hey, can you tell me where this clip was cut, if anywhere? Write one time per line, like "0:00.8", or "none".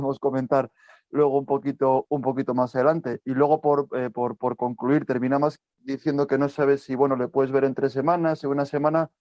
none

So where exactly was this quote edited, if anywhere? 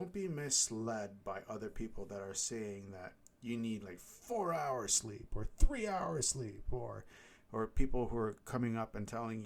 none

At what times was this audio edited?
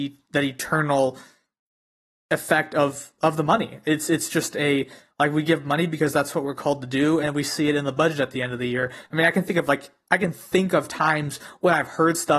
0:07.2
0:09.0

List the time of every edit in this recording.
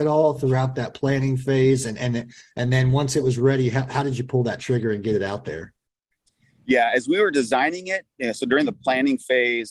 none

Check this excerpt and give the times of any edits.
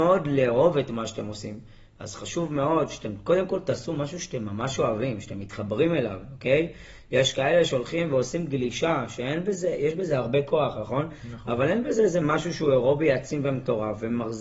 0:01.9

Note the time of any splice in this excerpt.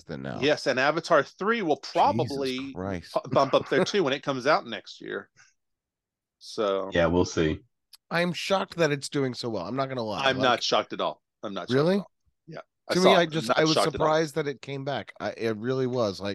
none

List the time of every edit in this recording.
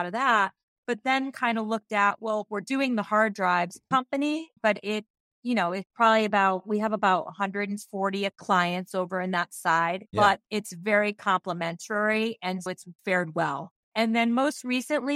0:03.9
0:10.1
0:12.7

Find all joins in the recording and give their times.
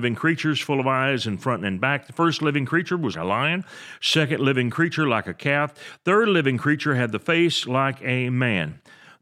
0:03.1

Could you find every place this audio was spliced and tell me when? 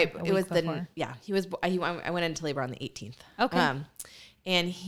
none

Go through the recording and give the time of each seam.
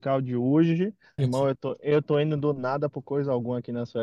0:01.2

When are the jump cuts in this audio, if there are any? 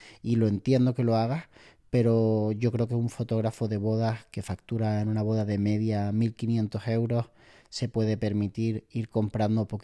none

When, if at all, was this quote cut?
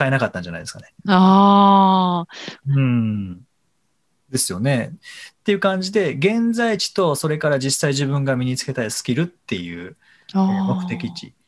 0:02.6
0:05.4

